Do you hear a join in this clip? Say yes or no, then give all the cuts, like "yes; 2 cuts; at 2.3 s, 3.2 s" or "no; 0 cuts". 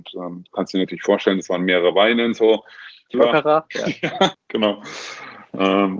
yes; 2 cuts; at 3.1 s, 4.3 s